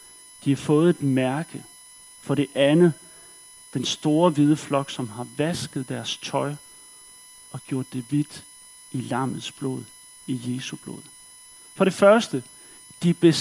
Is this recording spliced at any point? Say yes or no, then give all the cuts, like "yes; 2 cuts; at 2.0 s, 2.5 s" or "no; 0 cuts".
no; 0 cuts